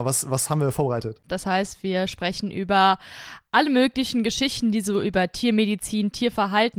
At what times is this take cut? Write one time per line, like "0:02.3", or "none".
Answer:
0:01.2